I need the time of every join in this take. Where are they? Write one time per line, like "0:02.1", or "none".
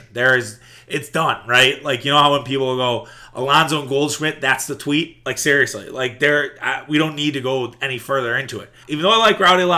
0:08.8